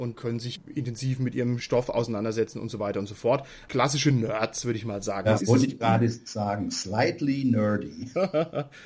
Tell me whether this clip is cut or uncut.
cut